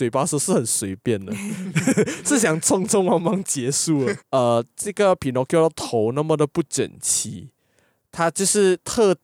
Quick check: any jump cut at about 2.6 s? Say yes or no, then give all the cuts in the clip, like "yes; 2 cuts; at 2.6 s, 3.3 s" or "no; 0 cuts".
no; 1 cut; at 4.2 s